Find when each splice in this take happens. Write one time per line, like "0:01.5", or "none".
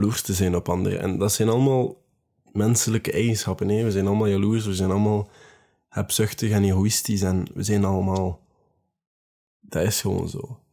0:09.6